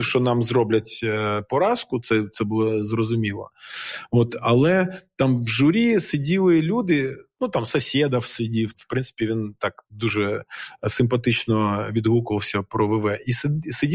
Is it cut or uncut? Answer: cut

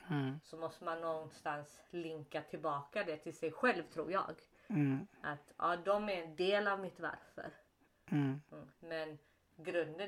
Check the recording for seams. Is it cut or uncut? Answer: cut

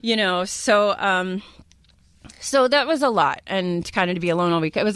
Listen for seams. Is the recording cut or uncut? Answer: uncut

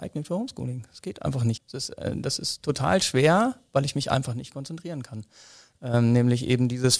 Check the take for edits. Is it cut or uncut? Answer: cut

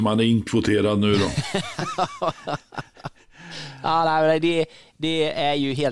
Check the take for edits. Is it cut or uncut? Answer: uncut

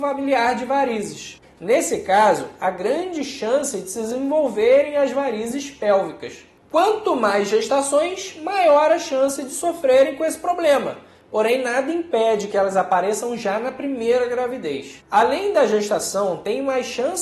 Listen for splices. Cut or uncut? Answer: cut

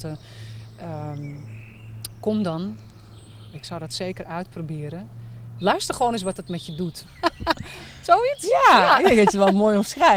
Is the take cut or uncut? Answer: cut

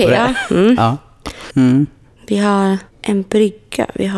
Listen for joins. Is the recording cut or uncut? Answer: cut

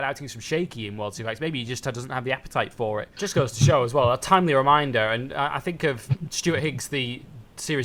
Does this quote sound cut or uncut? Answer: cut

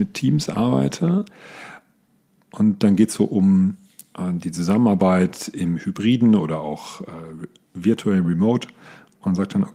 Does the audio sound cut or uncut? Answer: uncut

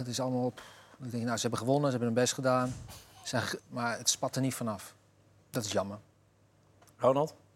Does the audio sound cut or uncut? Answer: cut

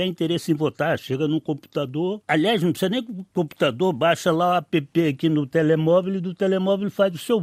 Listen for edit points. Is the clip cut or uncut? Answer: uncut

